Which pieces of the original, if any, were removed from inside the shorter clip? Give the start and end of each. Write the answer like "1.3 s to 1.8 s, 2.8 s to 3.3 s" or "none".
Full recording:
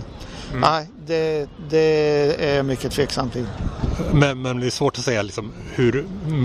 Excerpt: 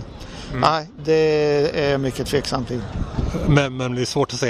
1.0 s to 1.6 s